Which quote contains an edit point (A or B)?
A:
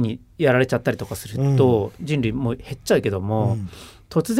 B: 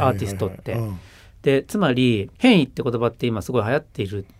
B